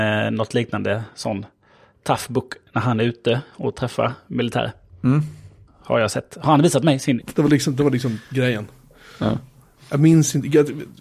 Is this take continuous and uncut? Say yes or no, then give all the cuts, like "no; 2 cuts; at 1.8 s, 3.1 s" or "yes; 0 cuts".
no; 1 cut; at 7.2 s